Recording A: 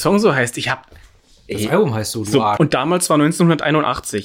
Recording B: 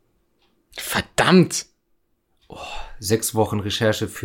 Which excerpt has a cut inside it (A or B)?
A